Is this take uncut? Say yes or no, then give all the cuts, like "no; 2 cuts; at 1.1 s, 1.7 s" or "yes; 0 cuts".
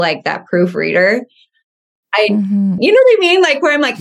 no; 1 cut; at 2.8 s